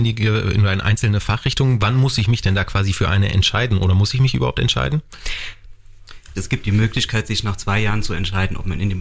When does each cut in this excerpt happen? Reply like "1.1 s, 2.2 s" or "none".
6.4 s